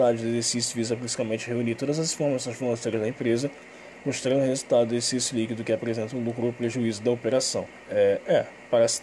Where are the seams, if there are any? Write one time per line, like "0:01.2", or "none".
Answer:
0:07.8